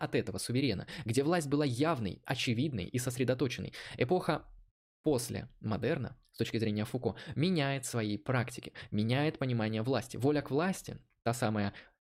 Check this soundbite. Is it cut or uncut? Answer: uncut